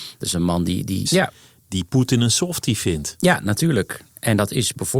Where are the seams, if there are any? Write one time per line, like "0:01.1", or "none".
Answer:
0:01.0